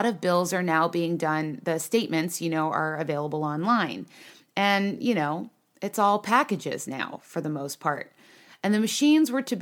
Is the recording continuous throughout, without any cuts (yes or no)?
yes